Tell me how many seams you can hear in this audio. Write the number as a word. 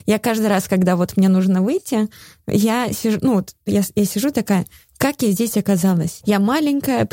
one